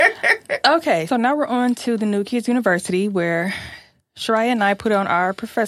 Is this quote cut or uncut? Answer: cut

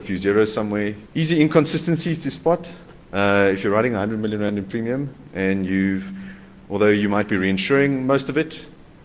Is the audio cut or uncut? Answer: cut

